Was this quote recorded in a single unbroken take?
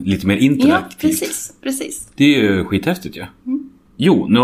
yes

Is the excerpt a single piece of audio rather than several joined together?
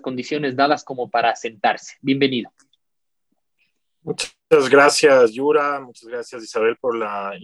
yes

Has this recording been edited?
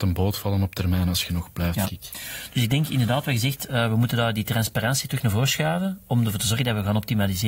yes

